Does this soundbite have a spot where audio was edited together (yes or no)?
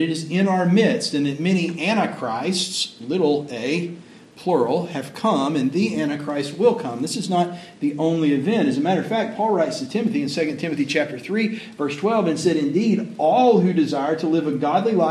no